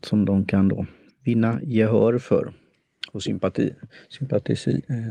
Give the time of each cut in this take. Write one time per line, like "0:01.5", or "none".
0:01.1